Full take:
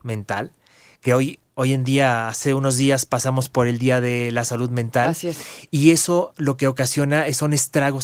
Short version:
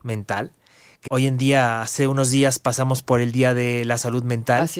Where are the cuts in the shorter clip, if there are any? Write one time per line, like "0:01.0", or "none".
0:01.1